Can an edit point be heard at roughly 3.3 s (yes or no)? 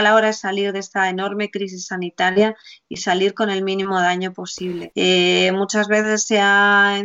no